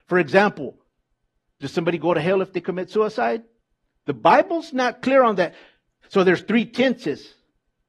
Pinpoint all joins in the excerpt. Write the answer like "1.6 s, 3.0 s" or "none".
4.0 s, 6.0 s

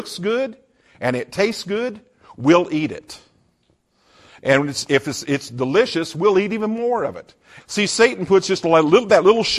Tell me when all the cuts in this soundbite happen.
7.6 s

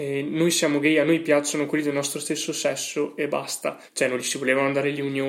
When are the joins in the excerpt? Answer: 3.9 s

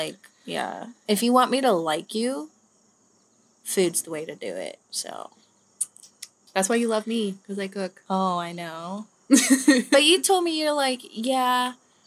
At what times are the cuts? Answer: 4.8 s

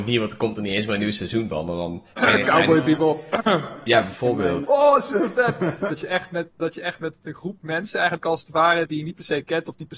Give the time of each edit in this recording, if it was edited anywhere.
2.1 s, 4.6 s, 5.9 s

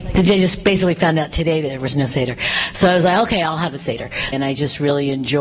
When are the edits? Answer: 4.3 s

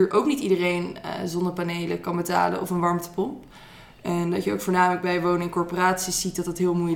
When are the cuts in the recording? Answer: none

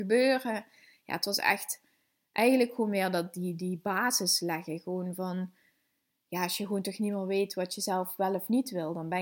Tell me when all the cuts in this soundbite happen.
none

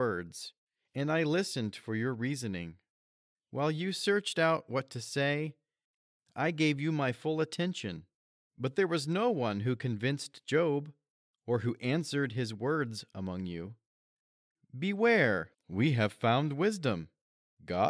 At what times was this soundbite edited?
6.3 s, 15.5 s

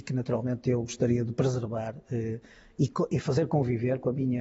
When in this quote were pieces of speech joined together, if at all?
none

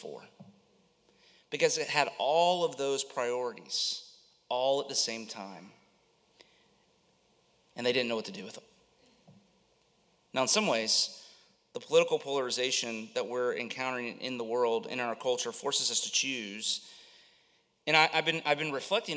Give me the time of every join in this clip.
10.3 s

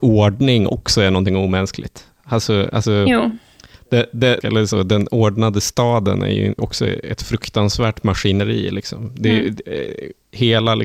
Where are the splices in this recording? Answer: 4.4 s, 6.6 s

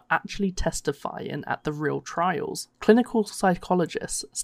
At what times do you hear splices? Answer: 2.7 s

